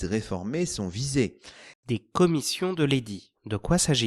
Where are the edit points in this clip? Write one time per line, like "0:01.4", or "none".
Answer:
0:01.7